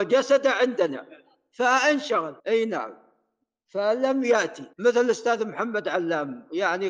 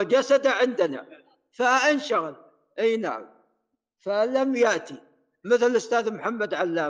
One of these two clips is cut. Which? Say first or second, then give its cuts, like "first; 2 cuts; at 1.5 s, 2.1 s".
first; 2 cuts; at 2.4 s, 4.7 s